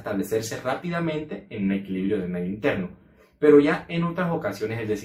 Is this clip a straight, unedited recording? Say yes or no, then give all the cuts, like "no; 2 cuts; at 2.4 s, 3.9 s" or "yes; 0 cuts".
yes; 0 cuts